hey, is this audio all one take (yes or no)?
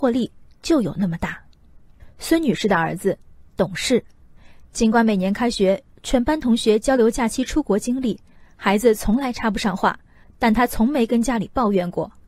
yes